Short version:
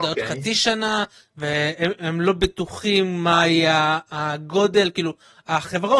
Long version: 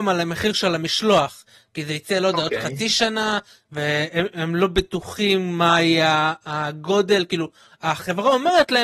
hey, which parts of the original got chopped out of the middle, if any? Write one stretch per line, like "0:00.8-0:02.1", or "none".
none